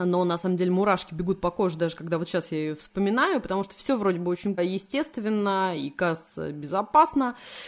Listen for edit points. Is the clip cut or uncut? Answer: cut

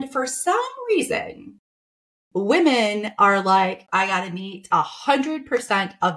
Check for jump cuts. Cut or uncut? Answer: cut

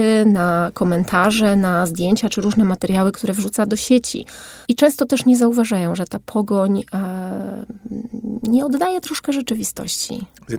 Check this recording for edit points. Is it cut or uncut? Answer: cut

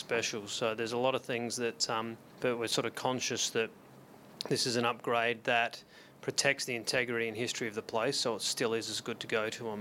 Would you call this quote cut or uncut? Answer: cut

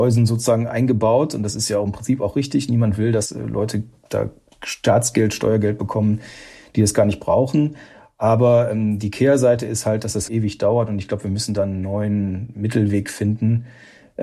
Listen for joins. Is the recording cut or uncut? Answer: cut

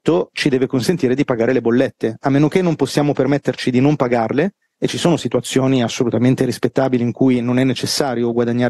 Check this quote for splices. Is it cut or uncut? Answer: uncut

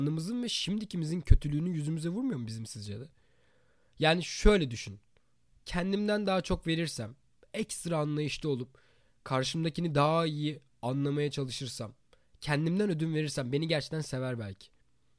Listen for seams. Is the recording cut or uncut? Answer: uncut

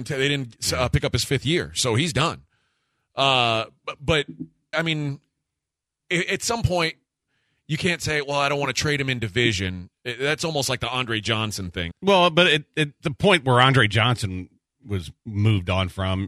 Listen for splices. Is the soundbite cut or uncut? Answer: cut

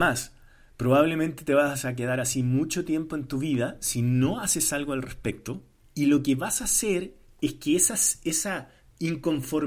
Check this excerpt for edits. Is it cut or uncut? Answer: uncut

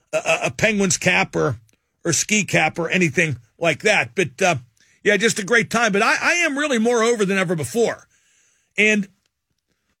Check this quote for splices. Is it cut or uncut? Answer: uncut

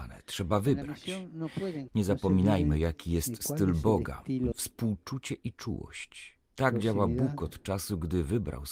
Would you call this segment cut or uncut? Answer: cut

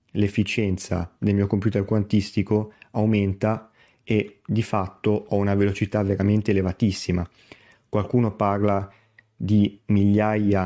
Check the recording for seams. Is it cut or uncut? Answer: uncut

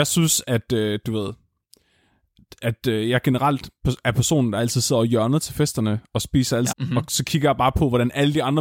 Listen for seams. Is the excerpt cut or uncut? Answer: cut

